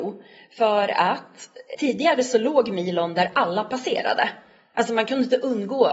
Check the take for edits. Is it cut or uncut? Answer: cut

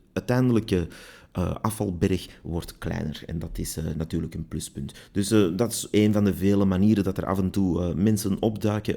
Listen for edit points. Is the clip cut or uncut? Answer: uncut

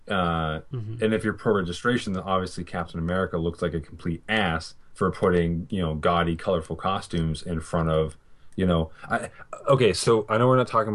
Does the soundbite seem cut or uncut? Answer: uncut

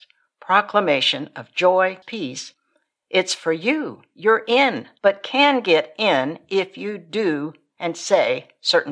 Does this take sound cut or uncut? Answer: cut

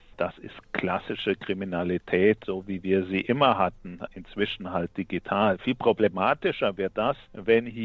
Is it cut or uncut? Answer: uncut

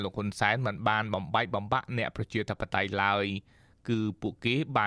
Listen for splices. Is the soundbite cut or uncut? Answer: uncut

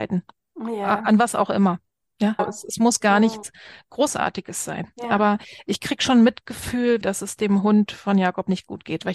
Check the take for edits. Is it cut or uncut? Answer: cut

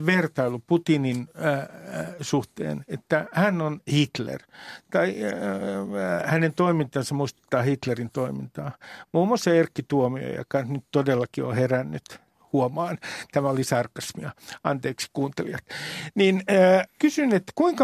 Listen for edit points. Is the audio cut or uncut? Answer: cut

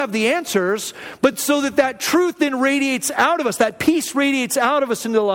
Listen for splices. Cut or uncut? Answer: uncut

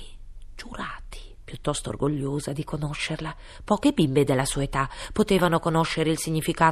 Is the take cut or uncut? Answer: uncut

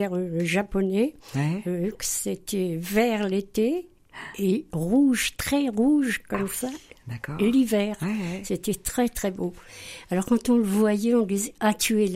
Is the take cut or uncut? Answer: uncut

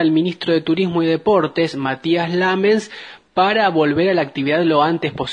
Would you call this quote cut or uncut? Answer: uncut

